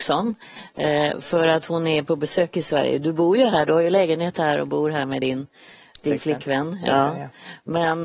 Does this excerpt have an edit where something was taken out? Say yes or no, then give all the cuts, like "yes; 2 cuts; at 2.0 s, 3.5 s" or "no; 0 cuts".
no; 0 cuts